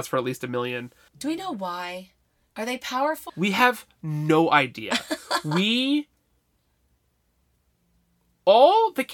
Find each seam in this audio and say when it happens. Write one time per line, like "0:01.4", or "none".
0:03.3